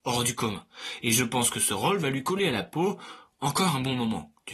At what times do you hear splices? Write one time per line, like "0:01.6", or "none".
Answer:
none